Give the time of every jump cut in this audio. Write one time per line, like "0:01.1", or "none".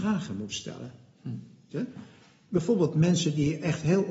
0:01.7